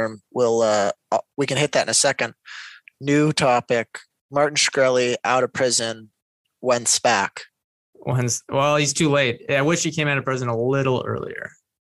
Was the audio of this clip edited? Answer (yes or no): no